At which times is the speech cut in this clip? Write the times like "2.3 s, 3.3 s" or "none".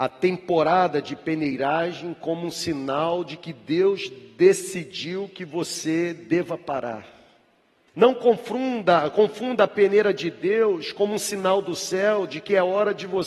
7.9 s

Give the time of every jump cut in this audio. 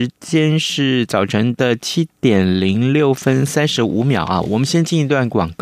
none

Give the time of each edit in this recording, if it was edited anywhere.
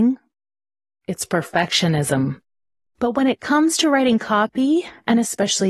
2.9 s

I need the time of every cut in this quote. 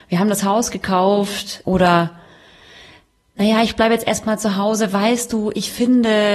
1.6 s

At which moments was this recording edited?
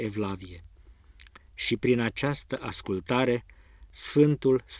none

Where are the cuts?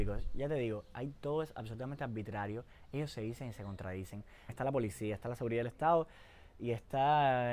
4.5 s

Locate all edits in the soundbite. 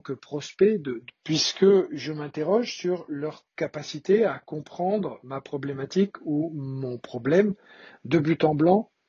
1.1 s, 3.5 s

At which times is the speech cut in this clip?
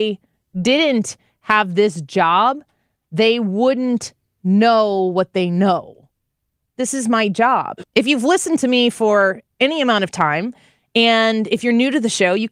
7.8 s

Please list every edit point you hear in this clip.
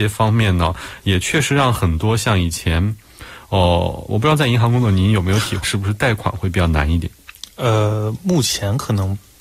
5.6 s

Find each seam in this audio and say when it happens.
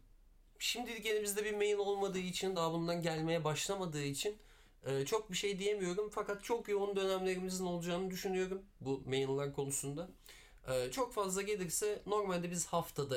none

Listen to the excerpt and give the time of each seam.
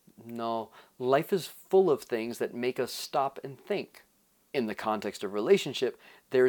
4.5 s

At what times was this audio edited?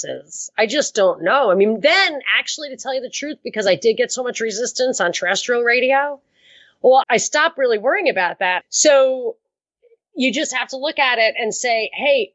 7.0 s, 8.6 s

